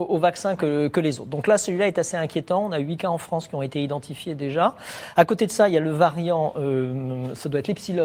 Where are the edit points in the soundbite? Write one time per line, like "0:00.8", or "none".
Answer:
none